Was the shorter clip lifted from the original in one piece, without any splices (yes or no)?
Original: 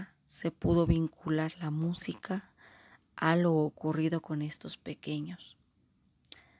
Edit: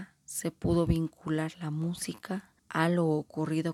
no